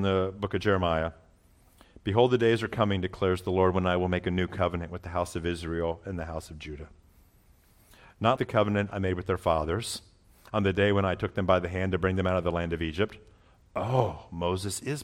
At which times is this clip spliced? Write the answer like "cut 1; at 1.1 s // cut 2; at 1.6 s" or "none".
cut 1; at 8.4 s